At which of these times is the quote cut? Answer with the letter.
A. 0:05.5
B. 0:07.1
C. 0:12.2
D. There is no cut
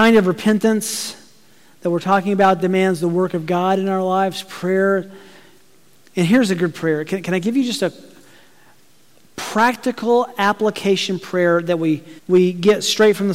C